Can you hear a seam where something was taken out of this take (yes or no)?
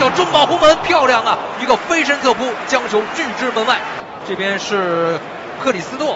yes